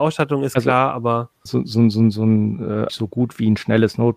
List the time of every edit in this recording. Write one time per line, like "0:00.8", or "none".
0:01.5
0:02.9